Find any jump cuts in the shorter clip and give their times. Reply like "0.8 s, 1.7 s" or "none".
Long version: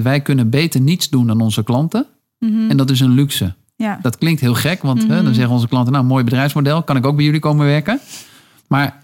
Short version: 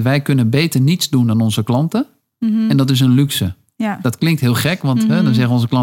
none